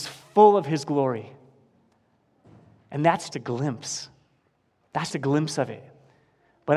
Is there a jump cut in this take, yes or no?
yes